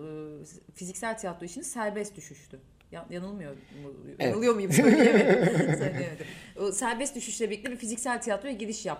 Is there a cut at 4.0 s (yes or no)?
no